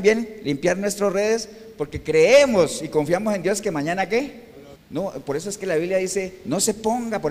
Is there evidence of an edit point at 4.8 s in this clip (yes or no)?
yes